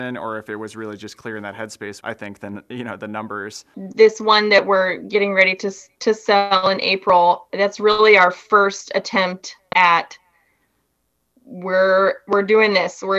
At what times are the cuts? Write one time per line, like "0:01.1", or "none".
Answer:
0:02.0